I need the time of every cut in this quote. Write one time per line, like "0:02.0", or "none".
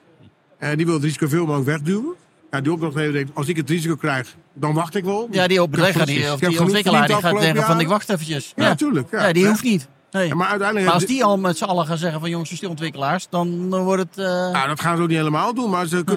0:12.6